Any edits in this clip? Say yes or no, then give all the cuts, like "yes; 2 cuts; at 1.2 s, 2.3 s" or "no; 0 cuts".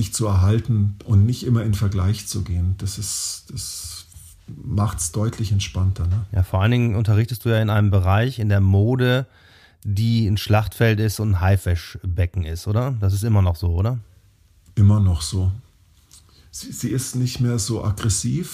no; 0 cuts